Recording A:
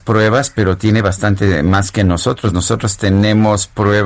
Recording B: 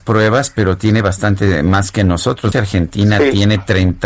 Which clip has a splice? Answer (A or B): B